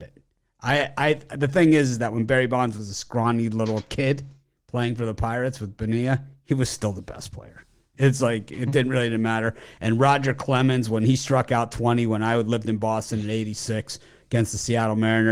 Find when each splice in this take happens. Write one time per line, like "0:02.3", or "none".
none